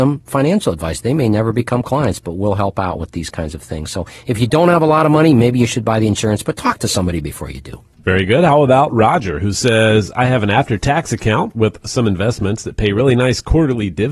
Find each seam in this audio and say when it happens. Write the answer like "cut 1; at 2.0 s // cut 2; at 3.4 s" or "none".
none